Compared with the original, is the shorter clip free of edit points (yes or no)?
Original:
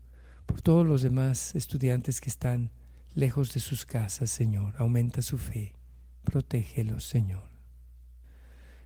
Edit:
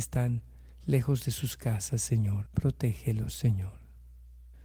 no